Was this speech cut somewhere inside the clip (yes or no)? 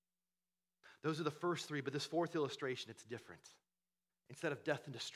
yes